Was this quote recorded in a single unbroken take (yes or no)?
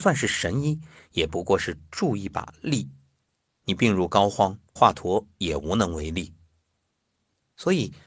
no